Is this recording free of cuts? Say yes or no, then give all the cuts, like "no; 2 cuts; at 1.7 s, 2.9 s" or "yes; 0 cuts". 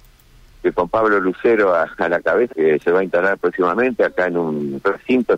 no; 1 cut; at 2.5 s